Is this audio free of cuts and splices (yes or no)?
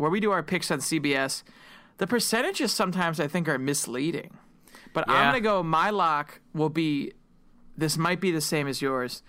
yes